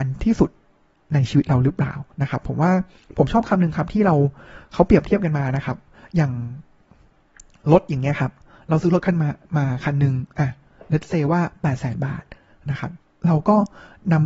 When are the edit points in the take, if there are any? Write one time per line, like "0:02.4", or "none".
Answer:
0:02.1

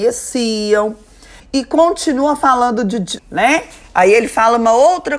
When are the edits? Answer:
0:01.4
0:03.2

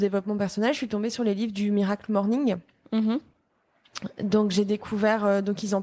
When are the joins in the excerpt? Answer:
none

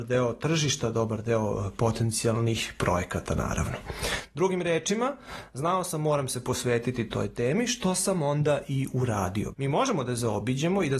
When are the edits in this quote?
0:09.5

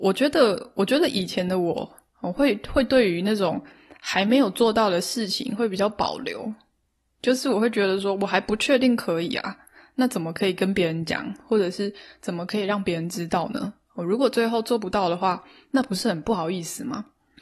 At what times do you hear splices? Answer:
none

